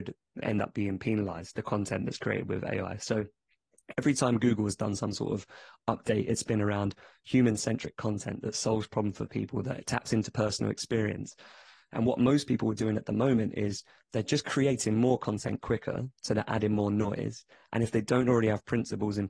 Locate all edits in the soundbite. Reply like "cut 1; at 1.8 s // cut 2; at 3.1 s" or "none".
none